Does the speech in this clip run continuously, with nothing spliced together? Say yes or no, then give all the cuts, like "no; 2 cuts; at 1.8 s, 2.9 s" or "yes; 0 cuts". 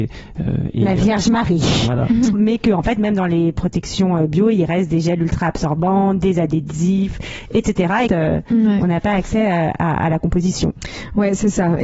no; 2 cuts; at 2.3 s, 8.1 s